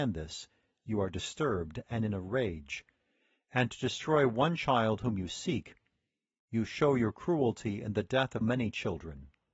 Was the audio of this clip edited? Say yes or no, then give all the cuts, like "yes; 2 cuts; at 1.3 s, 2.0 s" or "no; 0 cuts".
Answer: yes; 1 cut; at 8.4 s